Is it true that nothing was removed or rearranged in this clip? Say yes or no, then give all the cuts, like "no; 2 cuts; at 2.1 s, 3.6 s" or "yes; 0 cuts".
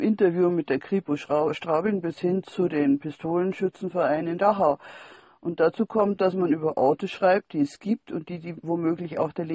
yes; 0 cuts